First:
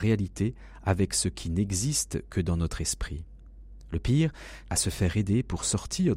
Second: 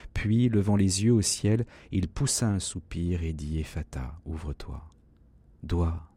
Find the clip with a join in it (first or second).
first